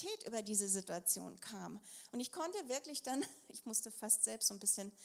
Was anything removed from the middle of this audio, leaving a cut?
no; 0 cuts

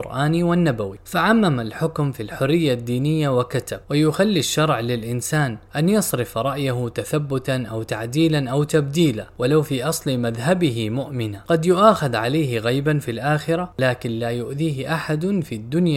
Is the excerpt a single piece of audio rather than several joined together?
no; 2 cuts; at 3.8 s, 5.7 s

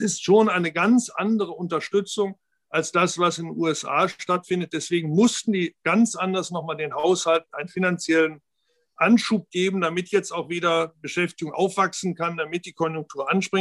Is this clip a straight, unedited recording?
yes; 0 cuts

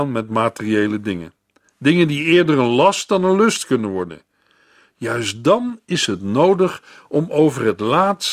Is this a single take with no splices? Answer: yes; 0 cuts

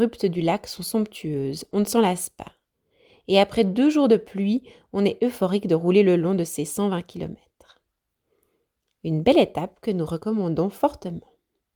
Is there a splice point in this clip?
no; 0 cuts

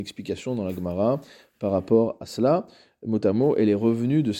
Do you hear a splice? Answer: no; 0 cuts

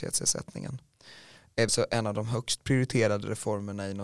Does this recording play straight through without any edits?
no; 1 cut; at 1.7 s

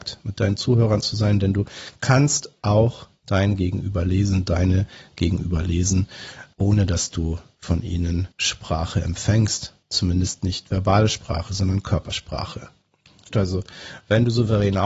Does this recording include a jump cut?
yes; 2 cuts; at 9.8 s, 13.3 s

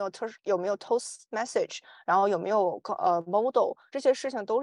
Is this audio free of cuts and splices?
yes; 0 cuts

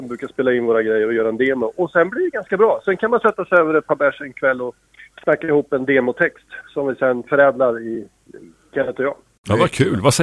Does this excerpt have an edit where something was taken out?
no; 0 cuts

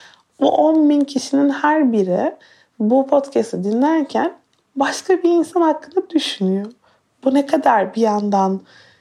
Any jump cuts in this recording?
no; 0 cuts

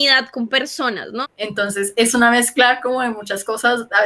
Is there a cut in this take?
yes; 1 cut; at 1.2 s

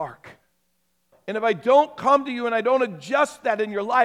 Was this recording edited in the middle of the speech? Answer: yes; 1 cut; at 1.1 s

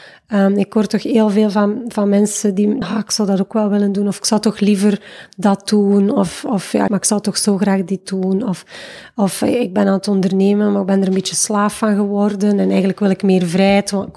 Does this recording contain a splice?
yes; 2 cuts; at 2.8 s, 6.9 s

